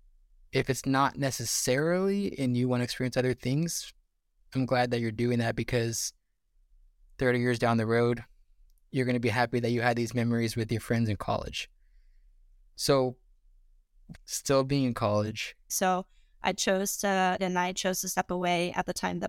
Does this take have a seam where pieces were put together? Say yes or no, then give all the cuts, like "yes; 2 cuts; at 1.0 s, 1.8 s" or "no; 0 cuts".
yes; 3 cuts; at 14.1 s, 15.7 s, 17.4 s